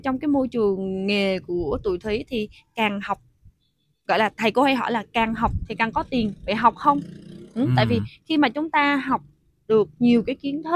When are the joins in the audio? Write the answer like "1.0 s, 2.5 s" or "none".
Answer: none